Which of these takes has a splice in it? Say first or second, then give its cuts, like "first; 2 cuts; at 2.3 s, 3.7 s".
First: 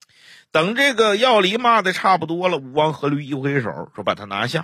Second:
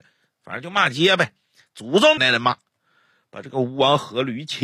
second; 1 cut; at 2.2 s